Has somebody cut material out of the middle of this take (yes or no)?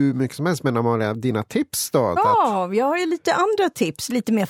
yes